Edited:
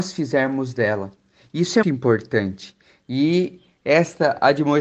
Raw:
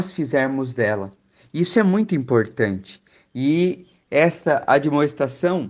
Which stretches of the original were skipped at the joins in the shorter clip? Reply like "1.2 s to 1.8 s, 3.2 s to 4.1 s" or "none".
1.8 s to 2.1 s